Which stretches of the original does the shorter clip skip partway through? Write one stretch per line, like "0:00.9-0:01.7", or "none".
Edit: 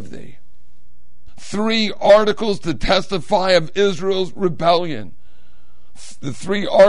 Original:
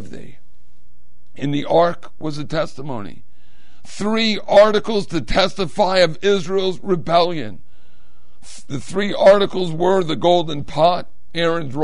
0:01.3-0:03.7

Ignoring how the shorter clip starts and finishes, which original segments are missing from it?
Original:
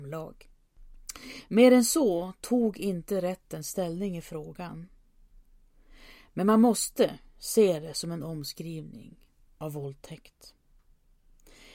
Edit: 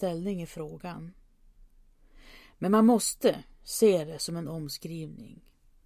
none

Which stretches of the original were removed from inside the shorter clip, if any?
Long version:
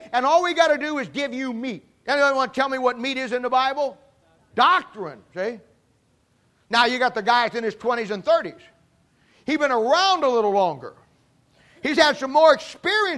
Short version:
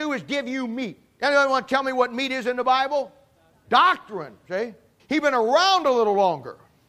0:05.9-0:09.4

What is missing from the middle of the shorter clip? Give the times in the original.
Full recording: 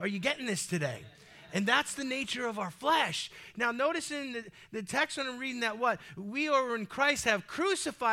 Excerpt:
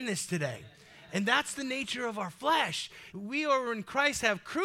0:03.5-0:06.1

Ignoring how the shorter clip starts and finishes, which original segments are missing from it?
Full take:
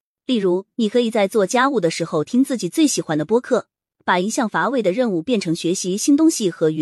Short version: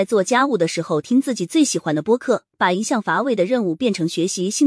0:03.8-0:04.0

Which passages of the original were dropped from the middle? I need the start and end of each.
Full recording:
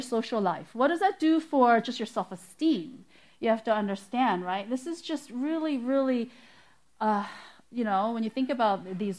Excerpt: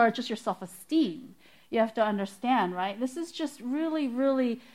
none

